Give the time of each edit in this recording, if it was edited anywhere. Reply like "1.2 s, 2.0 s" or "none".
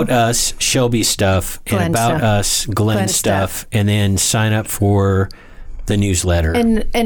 none